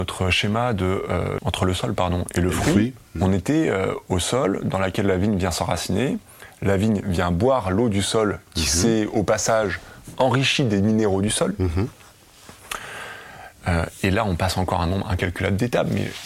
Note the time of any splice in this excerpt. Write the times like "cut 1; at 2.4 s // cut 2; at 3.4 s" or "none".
cut 1; at 1.4 s